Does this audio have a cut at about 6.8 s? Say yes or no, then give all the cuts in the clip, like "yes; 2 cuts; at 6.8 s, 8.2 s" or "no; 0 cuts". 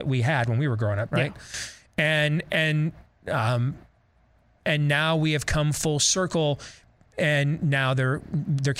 no; 1 cut; at 1.1 s